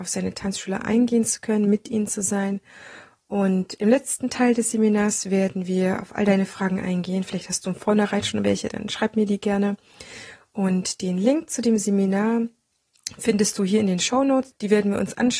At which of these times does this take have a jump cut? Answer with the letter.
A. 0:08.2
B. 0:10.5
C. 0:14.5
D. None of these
C